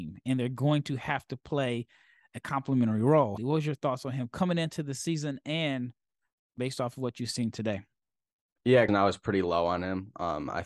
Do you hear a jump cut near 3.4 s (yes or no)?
yes